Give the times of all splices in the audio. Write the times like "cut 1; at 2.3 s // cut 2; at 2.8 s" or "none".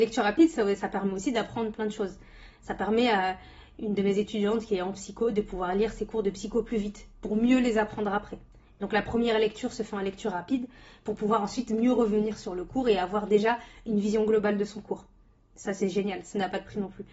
none